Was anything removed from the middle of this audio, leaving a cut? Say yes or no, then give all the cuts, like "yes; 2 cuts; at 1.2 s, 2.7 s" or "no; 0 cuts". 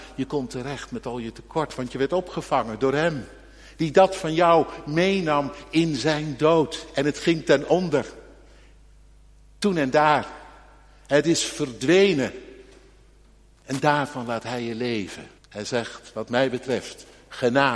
yes; 2 cuts; at 13.5 s, 15.4 s